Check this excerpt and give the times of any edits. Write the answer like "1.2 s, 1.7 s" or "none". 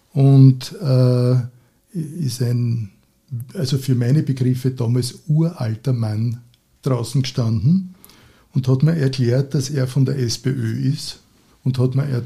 none